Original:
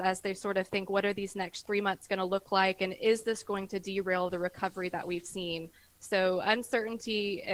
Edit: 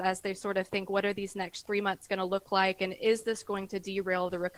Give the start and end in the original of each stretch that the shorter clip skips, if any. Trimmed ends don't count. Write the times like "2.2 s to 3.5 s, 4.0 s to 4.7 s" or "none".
none

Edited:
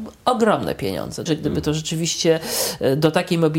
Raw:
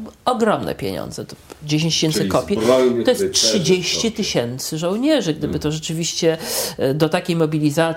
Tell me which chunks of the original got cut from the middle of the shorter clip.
1.3 s to 5.2 s

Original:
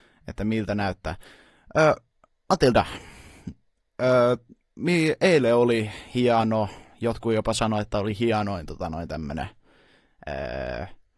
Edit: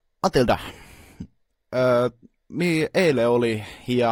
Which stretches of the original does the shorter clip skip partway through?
none

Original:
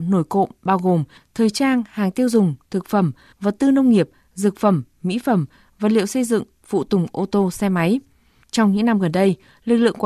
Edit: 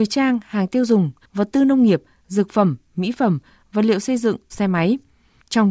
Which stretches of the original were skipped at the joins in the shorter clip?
2.6 s to 3.3 s, 6.6 s to 7.5 s

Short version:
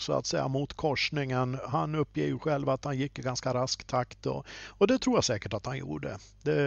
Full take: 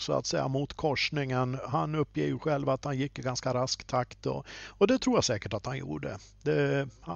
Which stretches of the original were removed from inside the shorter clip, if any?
none

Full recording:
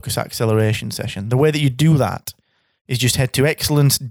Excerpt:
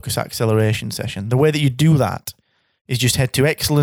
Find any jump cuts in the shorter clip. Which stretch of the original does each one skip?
none

